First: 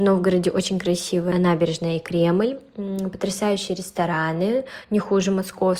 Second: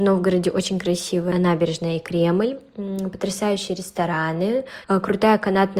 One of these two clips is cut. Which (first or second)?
second